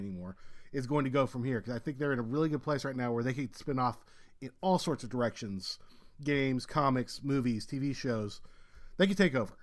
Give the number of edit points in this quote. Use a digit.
0